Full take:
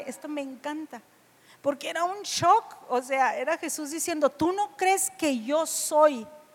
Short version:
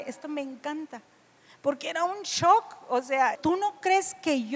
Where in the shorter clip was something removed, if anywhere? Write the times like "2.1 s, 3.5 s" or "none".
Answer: 3.3 s